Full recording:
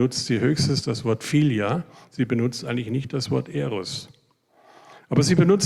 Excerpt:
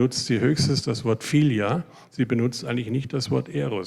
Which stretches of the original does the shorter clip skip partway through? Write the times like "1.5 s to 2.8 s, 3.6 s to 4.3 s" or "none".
none